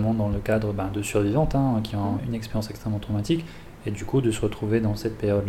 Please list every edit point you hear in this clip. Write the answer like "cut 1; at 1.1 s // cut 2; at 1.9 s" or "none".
cut 1; at 2.2 s